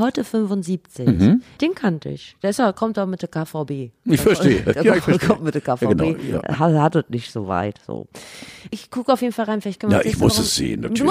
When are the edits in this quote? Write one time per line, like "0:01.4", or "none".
0:01.6